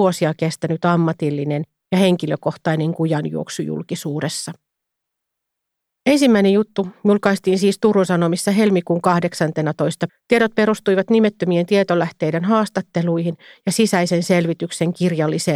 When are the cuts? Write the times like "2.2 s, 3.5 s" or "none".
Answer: 10.1 s